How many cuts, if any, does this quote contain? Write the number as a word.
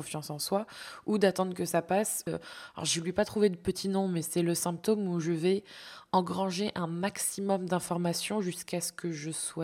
one